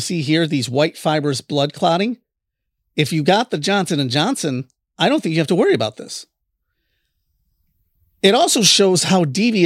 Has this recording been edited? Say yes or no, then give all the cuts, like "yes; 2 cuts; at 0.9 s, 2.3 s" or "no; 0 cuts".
no; 0 cuts